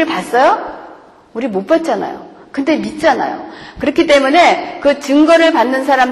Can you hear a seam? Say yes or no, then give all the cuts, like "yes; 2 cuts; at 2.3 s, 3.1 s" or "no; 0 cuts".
no; 0 cuts